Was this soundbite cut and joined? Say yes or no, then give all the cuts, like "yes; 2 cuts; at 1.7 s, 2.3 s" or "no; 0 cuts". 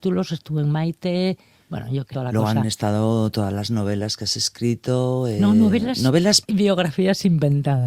yes; 1 cut; at 6.4 s